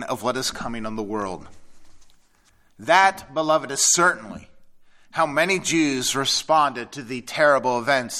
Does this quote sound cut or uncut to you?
uncut